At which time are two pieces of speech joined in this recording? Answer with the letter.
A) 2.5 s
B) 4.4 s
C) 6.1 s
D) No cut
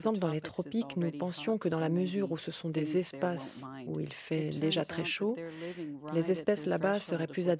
D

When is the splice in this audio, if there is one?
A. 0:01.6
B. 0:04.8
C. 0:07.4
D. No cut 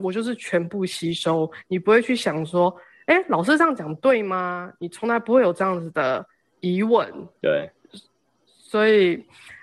C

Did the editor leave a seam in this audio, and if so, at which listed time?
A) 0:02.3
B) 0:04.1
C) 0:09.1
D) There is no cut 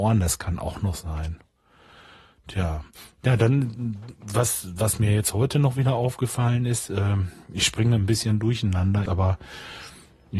C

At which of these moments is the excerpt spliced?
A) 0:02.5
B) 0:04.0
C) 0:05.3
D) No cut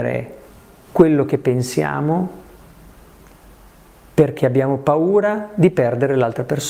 D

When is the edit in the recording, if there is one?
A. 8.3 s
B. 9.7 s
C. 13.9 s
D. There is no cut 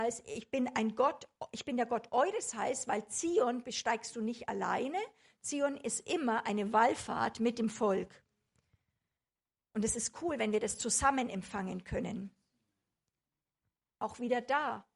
C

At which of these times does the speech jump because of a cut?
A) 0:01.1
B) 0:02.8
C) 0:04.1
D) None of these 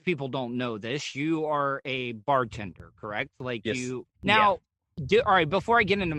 C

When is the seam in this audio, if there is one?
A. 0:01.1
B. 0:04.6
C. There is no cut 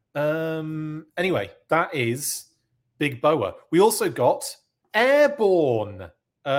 C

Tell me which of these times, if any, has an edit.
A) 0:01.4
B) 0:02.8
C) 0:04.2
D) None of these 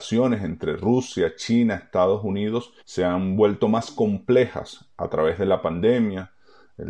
B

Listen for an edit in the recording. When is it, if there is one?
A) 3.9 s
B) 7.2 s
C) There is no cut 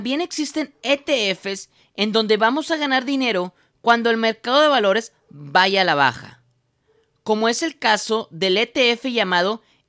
C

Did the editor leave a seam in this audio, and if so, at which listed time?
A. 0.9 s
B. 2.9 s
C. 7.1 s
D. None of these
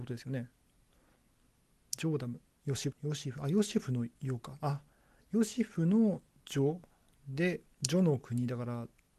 B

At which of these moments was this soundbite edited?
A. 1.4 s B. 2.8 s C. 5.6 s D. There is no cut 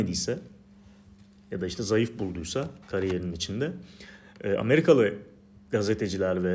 B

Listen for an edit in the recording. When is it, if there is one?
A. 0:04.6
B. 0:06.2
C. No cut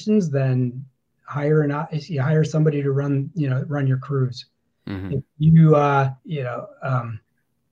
B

